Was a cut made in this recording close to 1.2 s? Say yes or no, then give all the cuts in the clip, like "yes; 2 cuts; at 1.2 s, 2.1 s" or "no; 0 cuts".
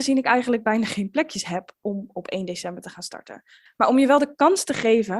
no; 1 cut; at 3.7 s